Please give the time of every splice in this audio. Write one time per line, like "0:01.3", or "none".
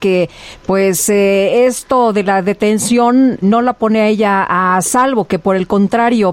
0:03.4